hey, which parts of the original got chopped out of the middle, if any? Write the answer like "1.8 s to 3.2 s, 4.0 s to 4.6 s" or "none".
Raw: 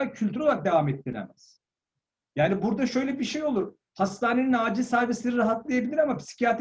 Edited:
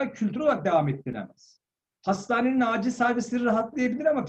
1.9 s to 3.8 s

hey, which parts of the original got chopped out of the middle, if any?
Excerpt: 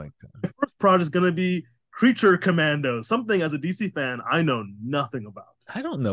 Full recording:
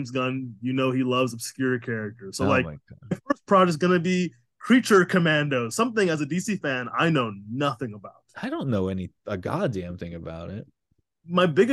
none

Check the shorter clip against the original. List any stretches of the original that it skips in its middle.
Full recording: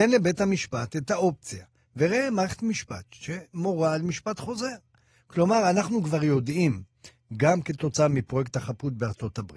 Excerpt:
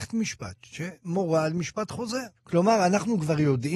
4.8 s to 5.2 s

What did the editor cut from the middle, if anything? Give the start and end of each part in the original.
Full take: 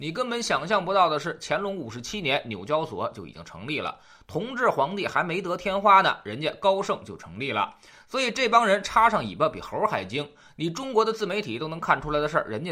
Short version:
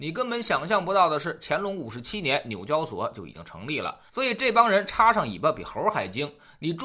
4.1 s to 8.1 s

